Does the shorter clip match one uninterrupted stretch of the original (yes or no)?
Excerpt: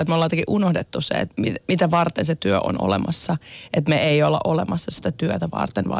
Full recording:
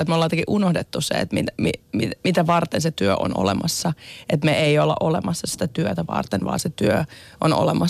no